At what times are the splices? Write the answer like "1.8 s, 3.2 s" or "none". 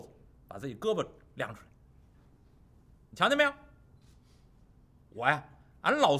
none